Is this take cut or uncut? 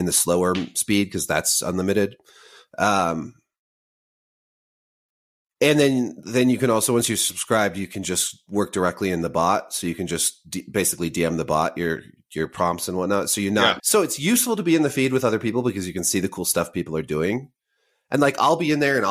cut